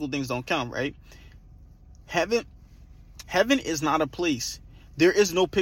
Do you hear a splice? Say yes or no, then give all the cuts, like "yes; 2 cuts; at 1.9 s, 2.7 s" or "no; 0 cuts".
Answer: yes; 1 cut; at 3.2 s